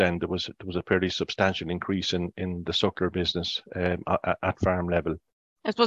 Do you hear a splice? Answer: no; 0 cuts

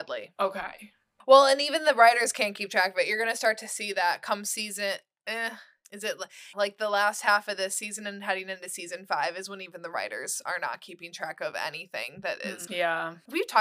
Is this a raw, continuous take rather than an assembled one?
no; 2 cuts; at 6.5 s, 12.7 s

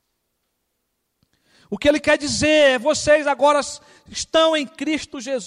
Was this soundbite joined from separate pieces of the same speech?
no; 0 cuts

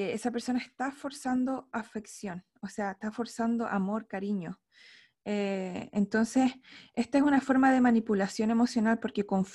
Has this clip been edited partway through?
no; 0 cuts

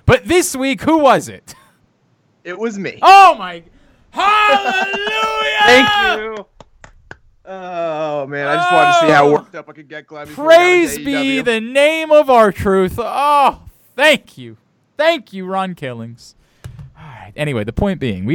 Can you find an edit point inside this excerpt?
no; 0 cuts

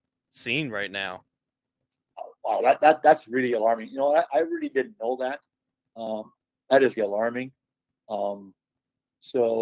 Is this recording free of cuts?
no; 1 cut; at 7.0 s

